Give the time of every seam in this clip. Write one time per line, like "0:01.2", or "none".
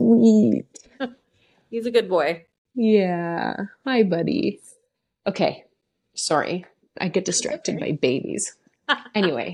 none